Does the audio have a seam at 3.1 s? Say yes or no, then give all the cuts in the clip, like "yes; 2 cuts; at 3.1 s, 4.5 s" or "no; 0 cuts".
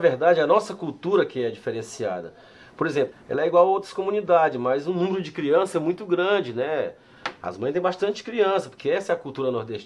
yes; 1 cut; at 3.1 s